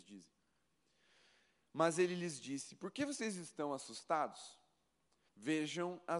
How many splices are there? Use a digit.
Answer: 1